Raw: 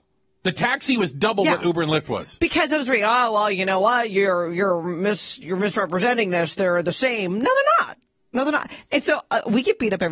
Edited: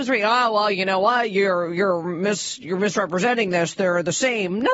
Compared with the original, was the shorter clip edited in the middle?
no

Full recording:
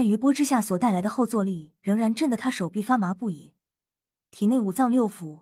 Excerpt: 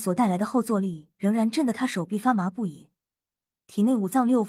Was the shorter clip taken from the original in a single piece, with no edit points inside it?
yes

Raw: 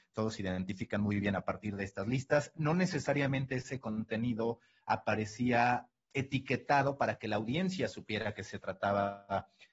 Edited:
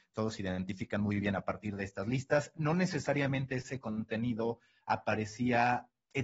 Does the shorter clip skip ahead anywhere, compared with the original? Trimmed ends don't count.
no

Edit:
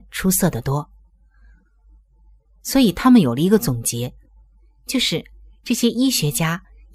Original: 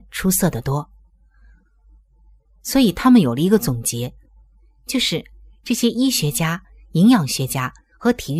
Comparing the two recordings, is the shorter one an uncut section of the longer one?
yes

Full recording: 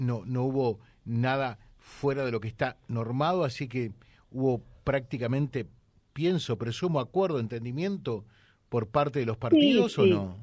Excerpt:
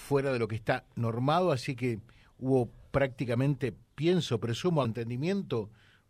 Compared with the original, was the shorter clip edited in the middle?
yes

